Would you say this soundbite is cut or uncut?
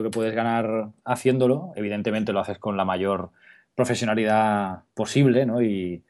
uncut